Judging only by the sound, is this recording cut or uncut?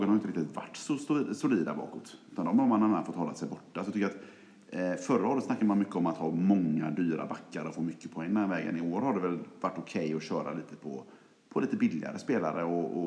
uncut